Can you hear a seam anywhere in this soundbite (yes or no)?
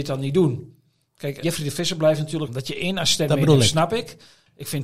yes